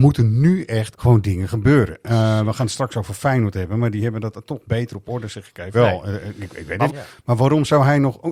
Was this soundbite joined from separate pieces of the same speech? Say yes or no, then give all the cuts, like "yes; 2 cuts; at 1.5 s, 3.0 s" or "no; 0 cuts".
yes; 3 cuts; at 0.9 s, 5.7 s, 6.9 s